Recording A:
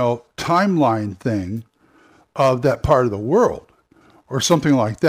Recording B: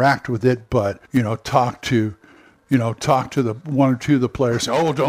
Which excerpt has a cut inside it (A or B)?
B